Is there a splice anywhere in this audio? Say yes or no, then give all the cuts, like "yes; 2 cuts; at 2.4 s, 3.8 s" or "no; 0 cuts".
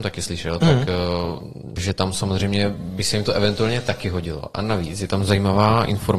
yes; 1 cut; at 1.8 s